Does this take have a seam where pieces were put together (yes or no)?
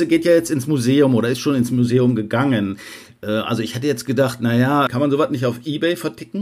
no